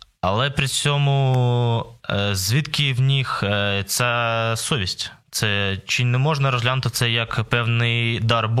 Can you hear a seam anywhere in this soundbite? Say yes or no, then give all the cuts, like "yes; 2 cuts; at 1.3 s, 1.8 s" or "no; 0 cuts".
no; 0 cuts